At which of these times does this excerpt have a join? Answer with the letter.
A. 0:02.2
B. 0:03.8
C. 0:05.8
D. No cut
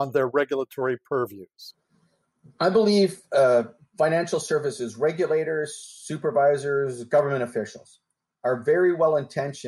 D